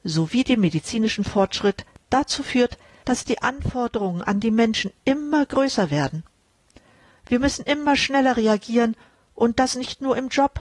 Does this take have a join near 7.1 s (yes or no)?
no